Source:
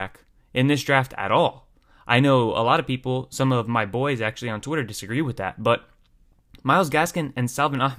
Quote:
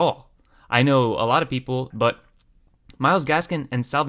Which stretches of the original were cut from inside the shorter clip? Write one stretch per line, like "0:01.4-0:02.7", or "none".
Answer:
0:03.3-0:05.5

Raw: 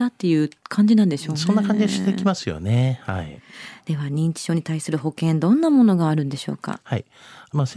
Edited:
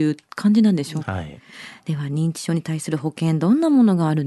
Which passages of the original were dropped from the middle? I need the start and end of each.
0:01.3-0:03.0

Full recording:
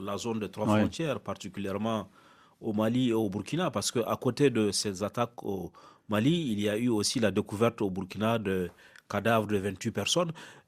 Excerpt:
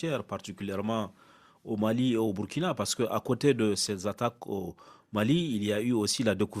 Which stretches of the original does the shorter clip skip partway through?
none

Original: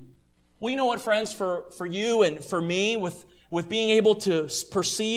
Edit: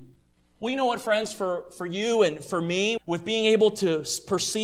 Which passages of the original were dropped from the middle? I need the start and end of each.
0:03.0-0:03.4

